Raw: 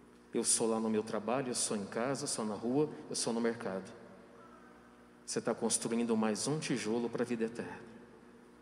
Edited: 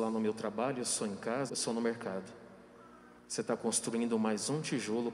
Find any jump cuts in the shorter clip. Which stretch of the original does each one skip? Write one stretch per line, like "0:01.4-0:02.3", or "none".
0:02.2-0:03.1
0:04.8-0:05.2

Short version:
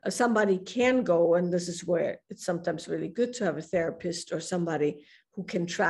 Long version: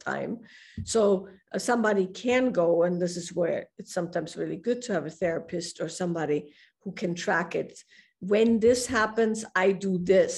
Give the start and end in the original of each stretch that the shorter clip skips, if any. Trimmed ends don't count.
none

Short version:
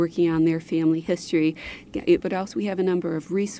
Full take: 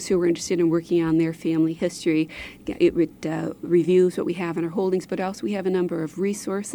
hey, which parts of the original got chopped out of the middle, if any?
0:02.9-0:05.1

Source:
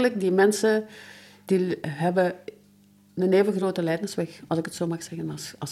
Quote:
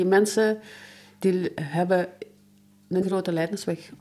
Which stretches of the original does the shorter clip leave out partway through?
0:03.3-0:03.5

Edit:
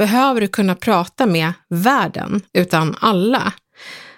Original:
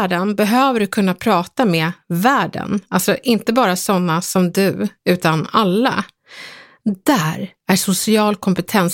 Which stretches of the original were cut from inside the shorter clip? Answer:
0:02.9-0:05.0

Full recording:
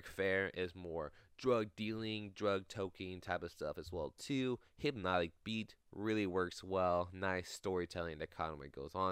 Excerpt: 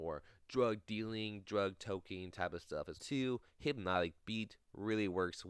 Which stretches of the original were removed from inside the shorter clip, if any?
0:03.8-0:04.1

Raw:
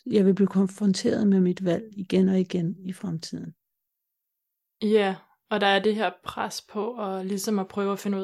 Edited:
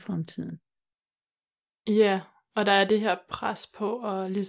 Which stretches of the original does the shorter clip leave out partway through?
none

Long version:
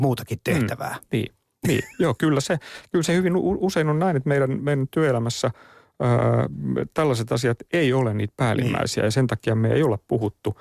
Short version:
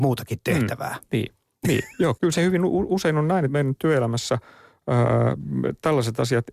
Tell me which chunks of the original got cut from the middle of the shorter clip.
0:02.2-0:02.9
0:04.2-0:04.6

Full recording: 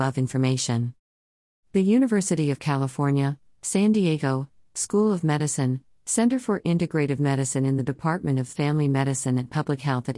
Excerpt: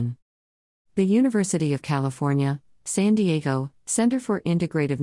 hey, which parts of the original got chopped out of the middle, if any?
0:04.5-0:05.9

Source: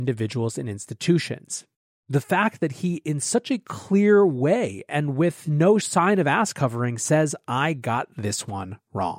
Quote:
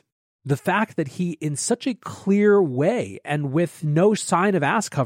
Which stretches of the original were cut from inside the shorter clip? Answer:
none

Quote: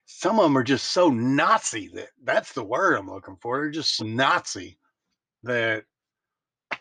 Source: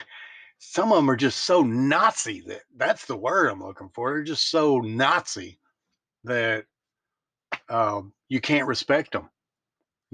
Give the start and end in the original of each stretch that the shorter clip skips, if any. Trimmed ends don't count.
0:04.5-0:04.8

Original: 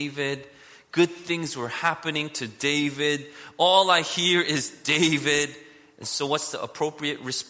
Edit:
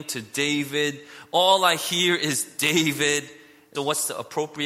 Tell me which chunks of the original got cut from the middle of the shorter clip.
0:06.0-0:06.2

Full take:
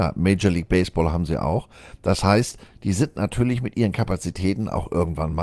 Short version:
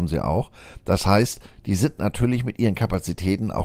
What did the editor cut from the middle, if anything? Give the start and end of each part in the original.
none

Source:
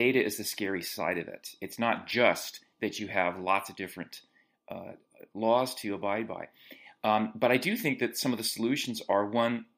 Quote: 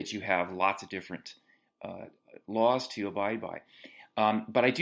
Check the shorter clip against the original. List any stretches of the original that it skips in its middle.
none

